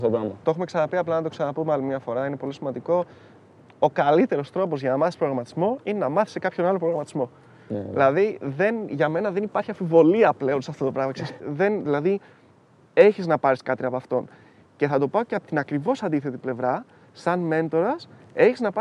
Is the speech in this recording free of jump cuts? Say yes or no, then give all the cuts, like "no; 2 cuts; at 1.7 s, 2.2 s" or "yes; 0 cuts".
no; 1 cut; at 11.4 s